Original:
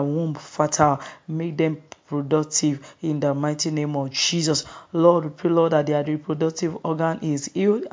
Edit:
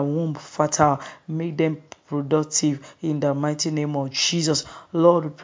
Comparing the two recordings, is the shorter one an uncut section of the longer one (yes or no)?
yes